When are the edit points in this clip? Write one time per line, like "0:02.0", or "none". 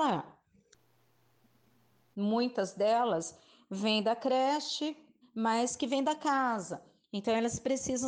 0:02.1
0:05.2